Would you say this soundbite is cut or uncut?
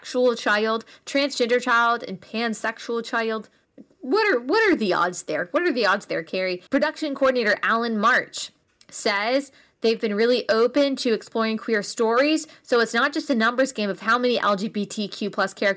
cut